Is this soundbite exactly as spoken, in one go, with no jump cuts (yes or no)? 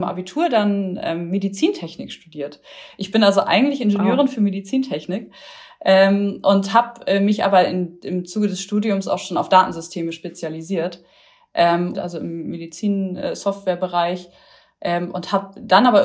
no